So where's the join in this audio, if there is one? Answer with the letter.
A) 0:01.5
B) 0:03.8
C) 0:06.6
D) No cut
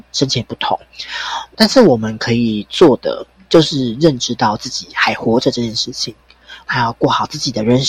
C